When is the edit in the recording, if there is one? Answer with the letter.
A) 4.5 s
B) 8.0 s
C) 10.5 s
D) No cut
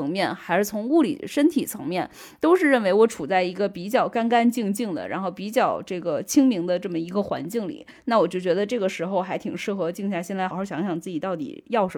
C